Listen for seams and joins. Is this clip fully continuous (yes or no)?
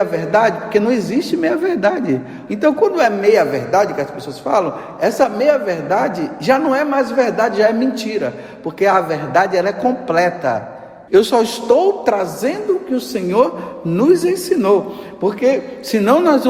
no